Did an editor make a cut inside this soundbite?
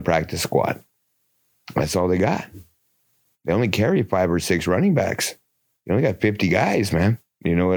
no; 0 cuts

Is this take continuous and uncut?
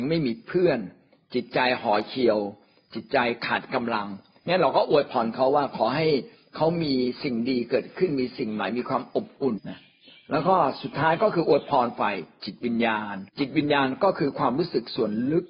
no; 2 cuts; at 9.6 s, 13.3 s

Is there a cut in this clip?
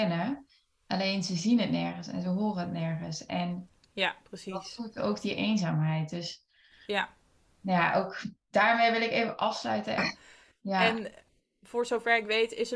yes; 1 cut; at 10.0 s

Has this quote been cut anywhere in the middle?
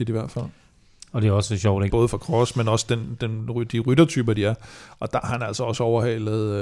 yes; 1 cut; at 1.9 s

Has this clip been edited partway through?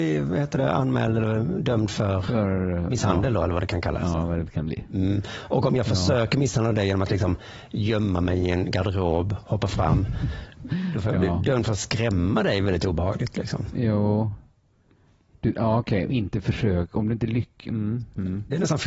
no; 0 cuts

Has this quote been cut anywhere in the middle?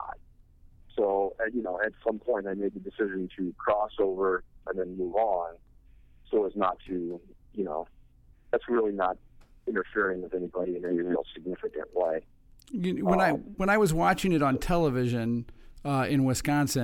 yes; 1 cut; at 4.7 s

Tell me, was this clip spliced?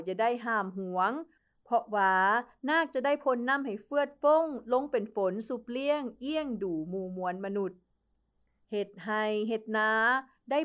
no; 0 cuts

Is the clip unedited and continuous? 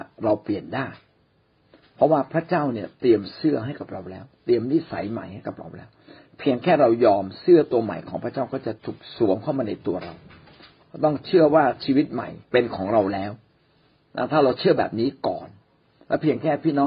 no; 2 cuts; at 8.8 s, 12.4 s

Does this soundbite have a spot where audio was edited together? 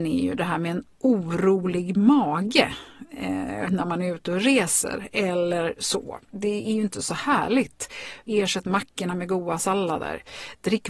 yes; 1 cut; at 8.2 s

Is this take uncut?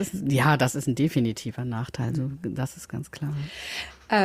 yes; 0 cuts

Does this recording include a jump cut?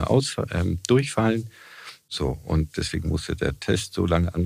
no; 0 cuts

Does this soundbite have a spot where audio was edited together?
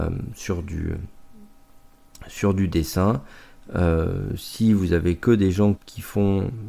yes; 1 cut; at 5.7 s

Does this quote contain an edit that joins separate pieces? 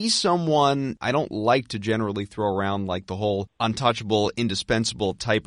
no; 0 cuts

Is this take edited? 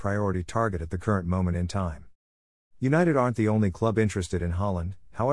yes; 1 cut; at 2.7 s

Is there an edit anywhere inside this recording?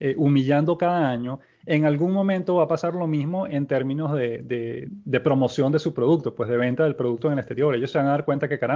yes; 1 cut; at 4.8 s

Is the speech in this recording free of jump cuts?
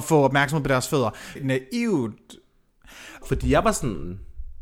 no; 2 cuts; at 1.4 s, 3.2 s

